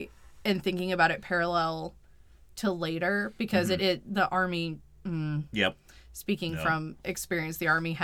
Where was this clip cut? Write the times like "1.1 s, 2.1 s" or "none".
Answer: none